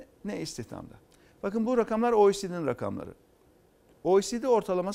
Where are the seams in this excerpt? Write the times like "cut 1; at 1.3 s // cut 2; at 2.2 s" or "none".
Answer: none